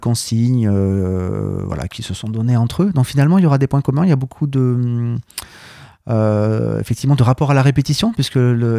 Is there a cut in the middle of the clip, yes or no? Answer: no